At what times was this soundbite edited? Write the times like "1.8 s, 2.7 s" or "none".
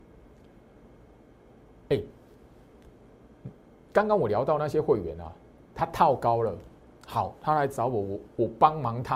none